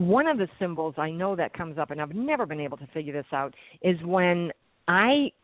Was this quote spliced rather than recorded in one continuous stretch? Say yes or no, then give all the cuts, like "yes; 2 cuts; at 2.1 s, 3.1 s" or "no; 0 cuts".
no; 0 cuts